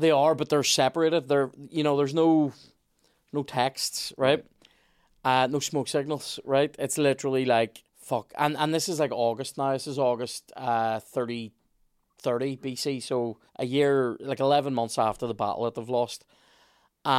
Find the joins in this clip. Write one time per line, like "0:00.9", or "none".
0:07.9
0:13.5